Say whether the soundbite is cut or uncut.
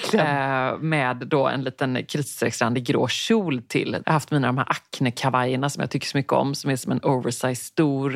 cut